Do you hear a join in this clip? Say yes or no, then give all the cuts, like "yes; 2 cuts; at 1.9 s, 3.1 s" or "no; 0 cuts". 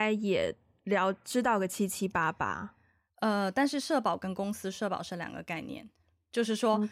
no; 0 cuts